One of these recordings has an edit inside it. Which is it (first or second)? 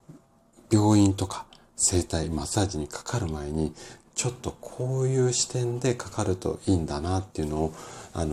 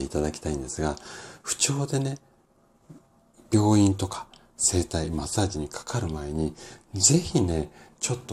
first